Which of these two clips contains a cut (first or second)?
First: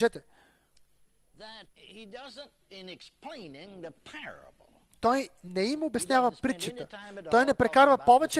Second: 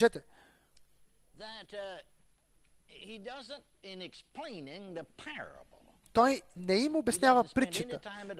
first